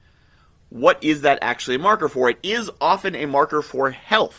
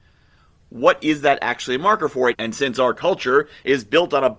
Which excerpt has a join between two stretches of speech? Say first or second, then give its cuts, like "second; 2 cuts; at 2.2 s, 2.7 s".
second; 1 cut; at 2.3 s